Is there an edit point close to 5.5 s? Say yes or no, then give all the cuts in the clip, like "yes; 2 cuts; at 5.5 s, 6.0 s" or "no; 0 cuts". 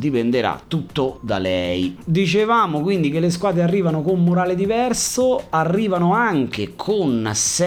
no; 1 cut; at 2.0 s